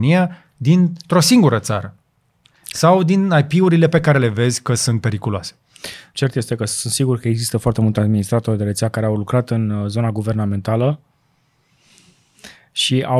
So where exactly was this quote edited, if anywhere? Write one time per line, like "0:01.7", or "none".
0:06.1